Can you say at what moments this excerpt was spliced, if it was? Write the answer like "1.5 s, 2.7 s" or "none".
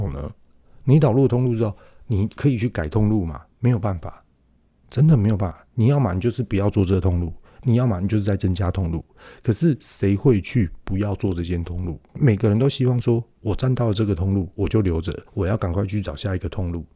12.1 s, 15.3 s